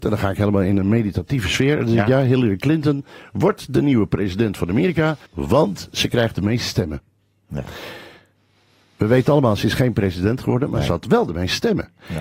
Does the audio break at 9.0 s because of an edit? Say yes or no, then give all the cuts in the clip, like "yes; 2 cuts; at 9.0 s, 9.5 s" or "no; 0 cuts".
no; 1 cut; at 5.3 s